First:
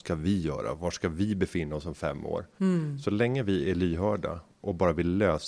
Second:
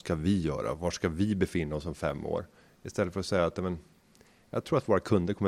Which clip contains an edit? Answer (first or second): first